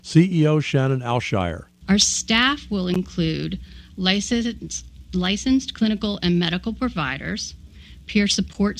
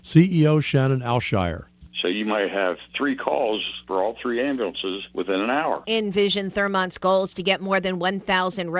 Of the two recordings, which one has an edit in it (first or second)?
second